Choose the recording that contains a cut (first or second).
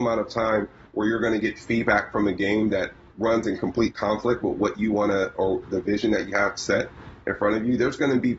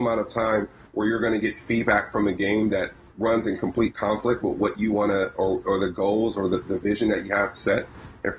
first